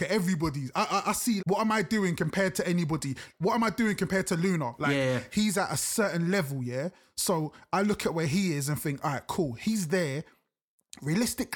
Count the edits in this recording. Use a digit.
1